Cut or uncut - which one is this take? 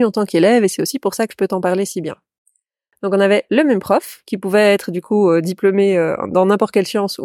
uncut